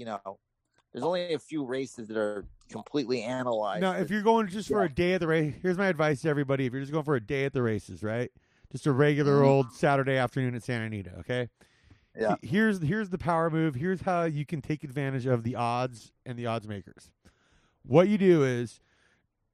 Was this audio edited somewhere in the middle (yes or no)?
no